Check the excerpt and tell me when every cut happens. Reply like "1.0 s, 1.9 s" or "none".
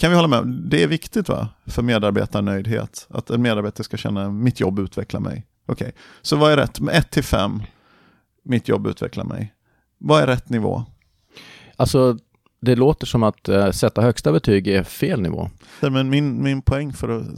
5.5 s, 15.8 s

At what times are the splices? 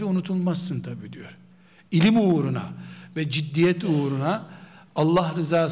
none

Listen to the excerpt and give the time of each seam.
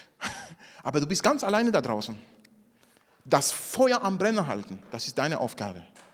none

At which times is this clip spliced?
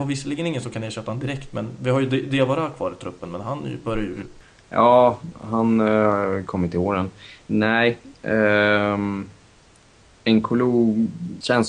none

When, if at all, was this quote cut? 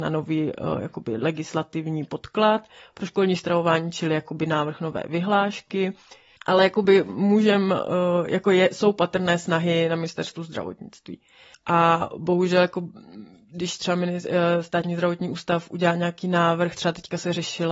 6.4 s, 11.5 s

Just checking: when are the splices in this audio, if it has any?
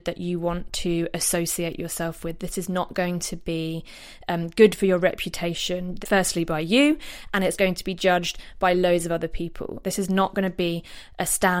6.0 s, 9.8 s

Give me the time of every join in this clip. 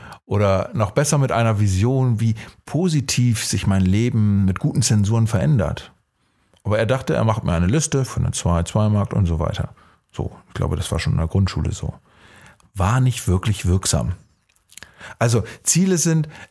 6.5 s, 8.1 s

